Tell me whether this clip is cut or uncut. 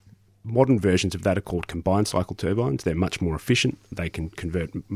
uncut